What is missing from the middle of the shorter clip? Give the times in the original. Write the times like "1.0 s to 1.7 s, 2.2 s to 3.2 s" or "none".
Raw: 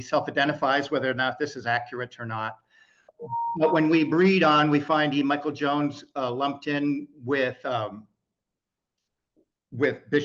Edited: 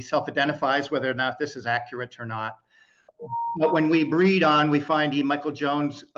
none